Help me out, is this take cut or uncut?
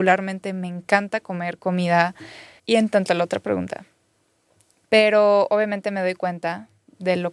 cut